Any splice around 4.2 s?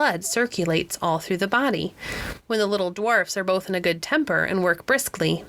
no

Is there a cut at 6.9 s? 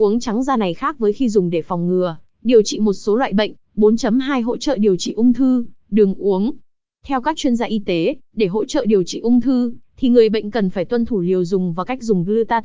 no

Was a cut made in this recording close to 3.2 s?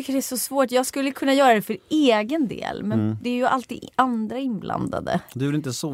no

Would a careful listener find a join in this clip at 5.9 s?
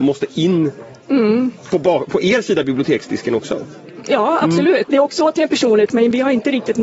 yes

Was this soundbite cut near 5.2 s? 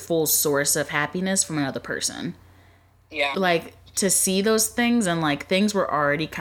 no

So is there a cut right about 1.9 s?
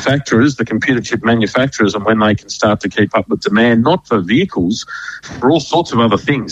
no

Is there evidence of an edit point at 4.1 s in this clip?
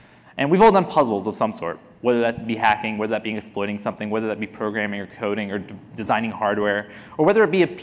no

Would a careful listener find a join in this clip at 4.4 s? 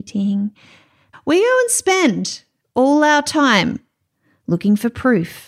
no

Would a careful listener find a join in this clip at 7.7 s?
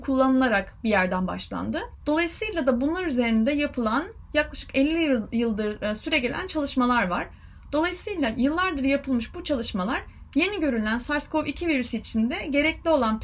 no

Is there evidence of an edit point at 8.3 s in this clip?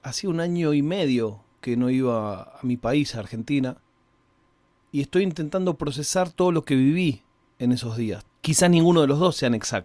yes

